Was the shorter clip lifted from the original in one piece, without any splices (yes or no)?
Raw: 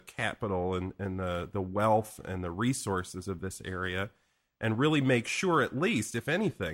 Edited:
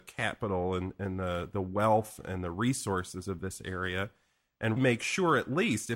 no